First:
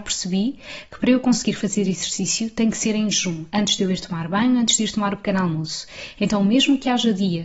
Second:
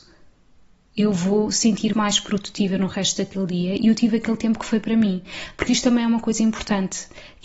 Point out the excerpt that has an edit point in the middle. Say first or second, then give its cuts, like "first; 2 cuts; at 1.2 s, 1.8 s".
second; 1 cut; at 1.9 s